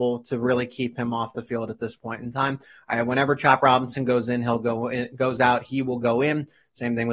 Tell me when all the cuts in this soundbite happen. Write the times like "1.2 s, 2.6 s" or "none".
none

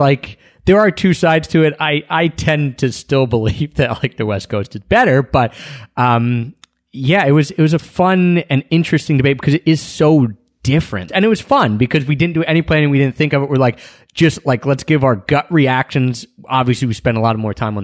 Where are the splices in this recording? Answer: 11.1 s

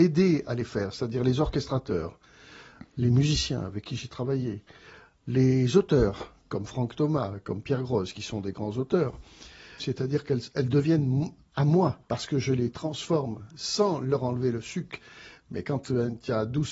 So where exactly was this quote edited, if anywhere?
9.8 s, 12.0 s

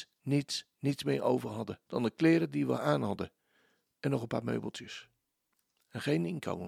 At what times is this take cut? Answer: 1.8 s

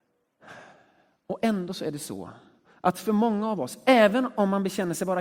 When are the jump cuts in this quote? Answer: none

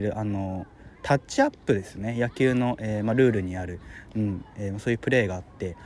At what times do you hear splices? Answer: 0.9 s

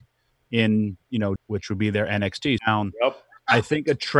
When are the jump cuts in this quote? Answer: 1.4 s, 2.6 s

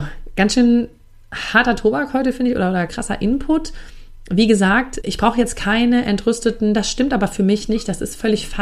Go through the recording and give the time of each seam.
2.9 s, 5.0 s

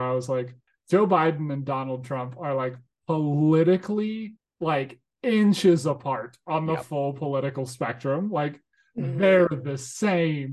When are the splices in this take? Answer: none

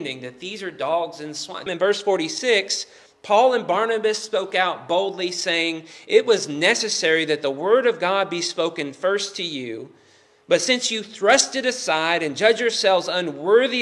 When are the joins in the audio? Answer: 1.7 s

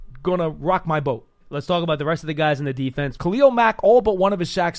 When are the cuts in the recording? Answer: 1.4 s, 3.2 s

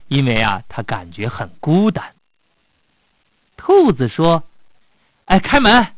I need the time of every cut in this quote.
none

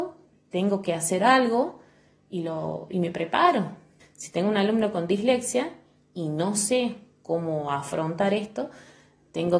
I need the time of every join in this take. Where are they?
4.0 s

